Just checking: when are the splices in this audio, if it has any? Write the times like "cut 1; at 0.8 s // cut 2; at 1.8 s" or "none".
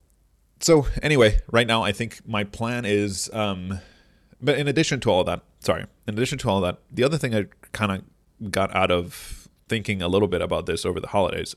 none